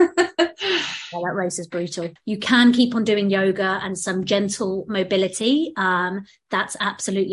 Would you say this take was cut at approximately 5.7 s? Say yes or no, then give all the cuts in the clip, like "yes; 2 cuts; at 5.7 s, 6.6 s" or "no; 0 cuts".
no; 1 cut; at 2.2 s